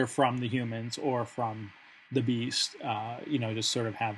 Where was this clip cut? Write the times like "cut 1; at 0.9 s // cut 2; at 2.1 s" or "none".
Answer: none